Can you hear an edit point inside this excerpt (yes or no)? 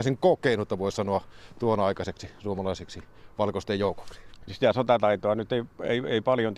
yes